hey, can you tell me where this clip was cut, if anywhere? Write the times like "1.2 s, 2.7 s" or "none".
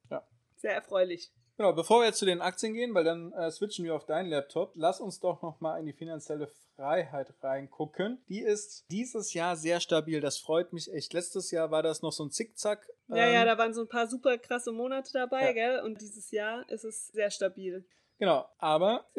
8.2 s